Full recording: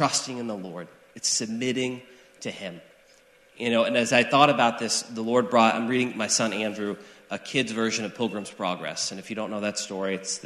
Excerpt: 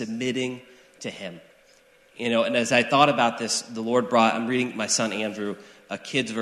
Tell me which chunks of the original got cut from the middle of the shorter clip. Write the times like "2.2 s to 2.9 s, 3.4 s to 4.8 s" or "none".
none